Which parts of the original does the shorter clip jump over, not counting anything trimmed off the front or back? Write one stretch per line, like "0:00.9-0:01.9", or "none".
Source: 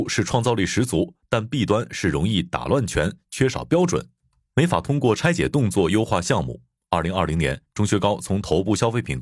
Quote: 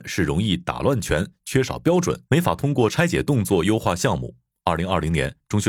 0:04.1-0:04.5